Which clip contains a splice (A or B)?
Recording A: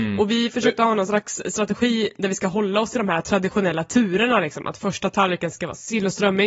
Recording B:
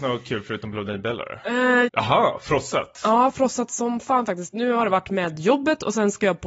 B